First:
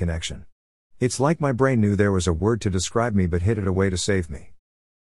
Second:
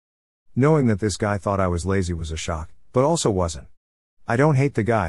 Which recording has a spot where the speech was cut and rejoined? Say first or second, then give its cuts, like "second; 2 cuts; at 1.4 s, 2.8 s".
second; 1 cut; at 4.1 s